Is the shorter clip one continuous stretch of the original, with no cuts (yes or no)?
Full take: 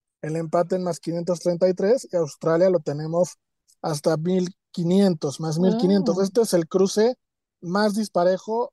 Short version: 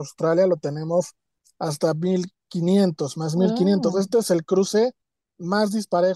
yes